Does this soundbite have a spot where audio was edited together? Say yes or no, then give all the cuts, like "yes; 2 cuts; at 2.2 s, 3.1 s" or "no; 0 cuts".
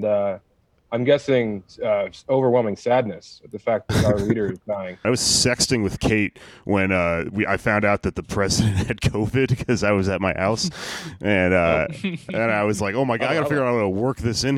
yes; 1 cut; at 5.0 s